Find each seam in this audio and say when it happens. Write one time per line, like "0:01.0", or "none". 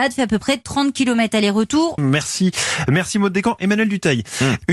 0:02.0